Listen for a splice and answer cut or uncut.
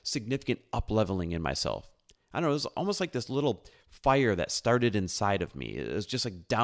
uncut